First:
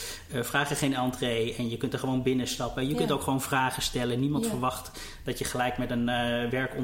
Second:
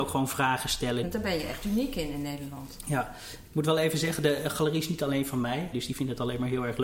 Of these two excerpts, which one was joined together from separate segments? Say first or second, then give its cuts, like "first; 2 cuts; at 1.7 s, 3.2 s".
second; 2 cuts; at 1.0 s, 5.7 s